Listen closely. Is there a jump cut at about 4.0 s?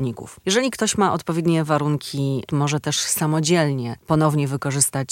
no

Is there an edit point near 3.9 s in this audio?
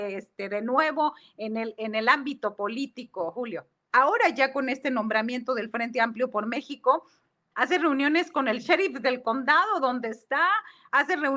yes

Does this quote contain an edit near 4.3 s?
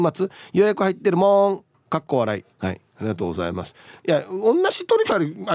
no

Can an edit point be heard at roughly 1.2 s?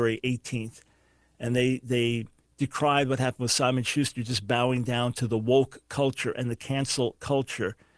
no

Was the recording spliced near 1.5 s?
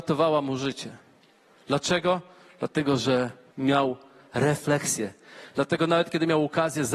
no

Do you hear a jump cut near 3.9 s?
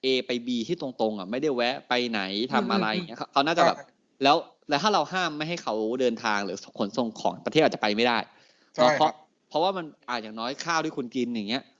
no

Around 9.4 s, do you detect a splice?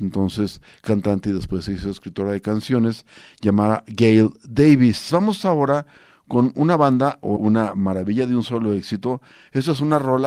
no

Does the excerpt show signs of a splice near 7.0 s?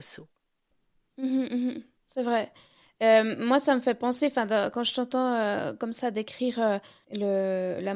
yes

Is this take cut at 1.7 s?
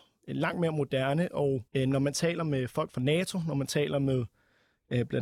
yes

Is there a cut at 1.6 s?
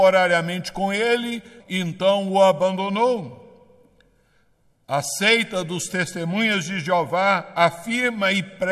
yes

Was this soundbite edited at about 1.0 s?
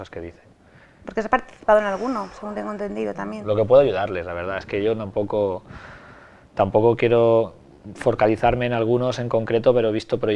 yes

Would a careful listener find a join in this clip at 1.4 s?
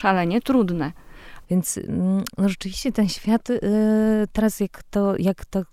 yes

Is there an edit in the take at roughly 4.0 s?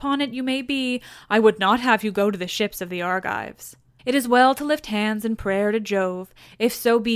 yes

